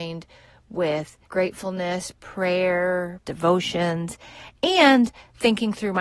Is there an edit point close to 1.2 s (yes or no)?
yes